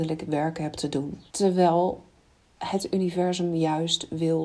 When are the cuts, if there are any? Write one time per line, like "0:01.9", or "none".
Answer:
0:01.3